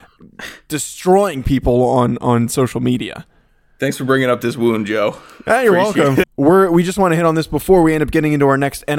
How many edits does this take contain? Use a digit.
1